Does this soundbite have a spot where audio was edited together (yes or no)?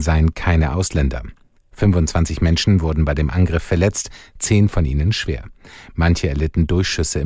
no